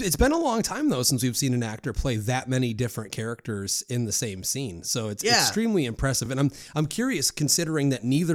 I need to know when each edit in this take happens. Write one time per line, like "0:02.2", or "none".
none